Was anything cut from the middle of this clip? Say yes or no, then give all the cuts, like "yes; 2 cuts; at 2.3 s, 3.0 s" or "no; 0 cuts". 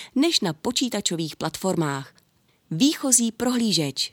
yes; 1 cut; at 2.5 s